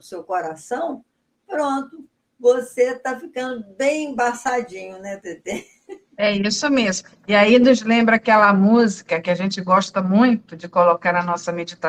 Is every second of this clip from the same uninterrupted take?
yes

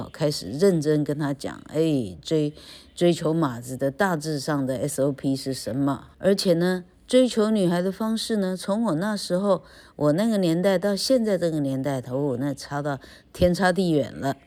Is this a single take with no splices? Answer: no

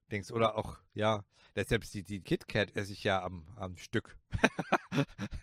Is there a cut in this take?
yes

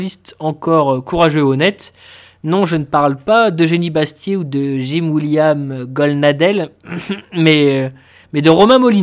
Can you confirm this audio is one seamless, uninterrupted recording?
yes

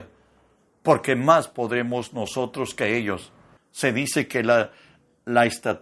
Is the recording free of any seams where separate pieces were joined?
no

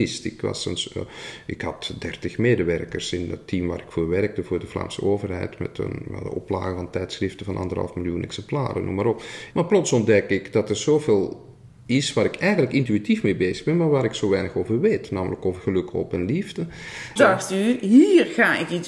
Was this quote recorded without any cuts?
no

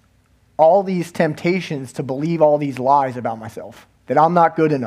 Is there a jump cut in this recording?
yes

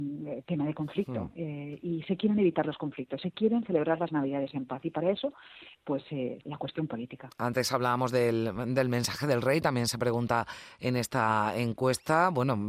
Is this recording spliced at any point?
yes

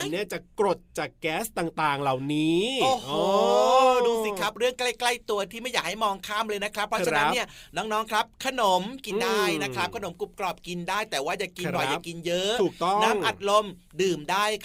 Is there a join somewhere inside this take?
no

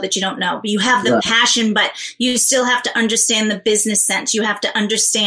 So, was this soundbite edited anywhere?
no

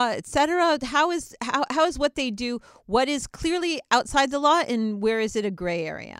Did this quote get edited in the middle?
no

